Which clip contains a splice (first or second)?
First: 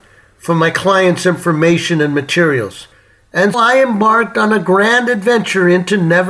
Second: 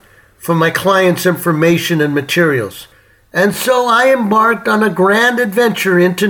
first